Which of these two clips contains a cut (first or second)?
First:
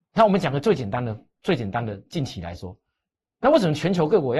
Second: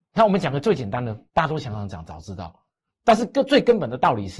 second